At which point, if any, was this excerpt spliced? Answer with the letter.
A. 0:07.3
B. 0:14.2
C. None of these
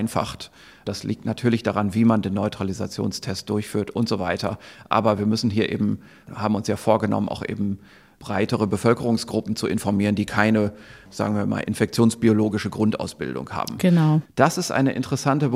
B